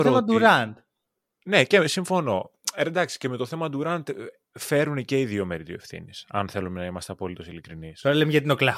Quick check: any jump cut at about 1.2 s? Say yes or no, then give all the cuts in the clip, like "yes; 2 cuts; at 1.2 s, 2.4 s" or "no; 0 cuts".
no; 0 cuts